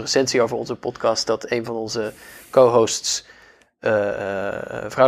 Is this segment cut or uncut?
uncut